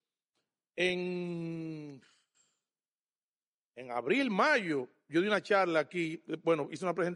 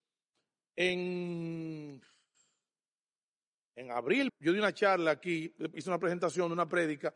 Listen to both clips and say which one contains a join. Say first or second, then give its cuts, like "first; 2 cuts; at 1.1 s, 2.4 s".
second; 2 cuts; at 4.3 s, 5.7 s